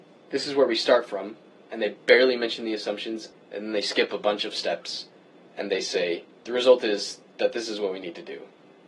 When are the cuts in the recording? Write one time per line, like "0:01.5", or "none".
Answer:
0:03.3

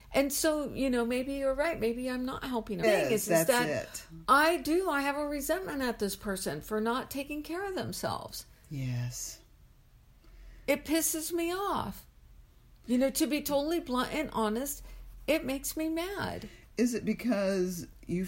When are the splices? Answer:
0:02.8

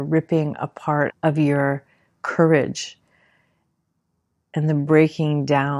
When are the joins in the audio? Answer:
0:01.1

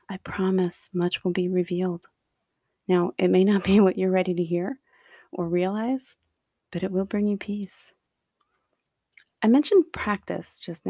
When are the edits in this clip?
none

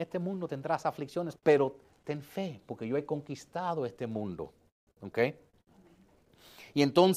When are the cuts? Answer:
0:01.4

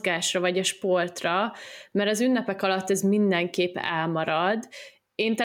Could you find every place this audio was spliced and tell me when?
none

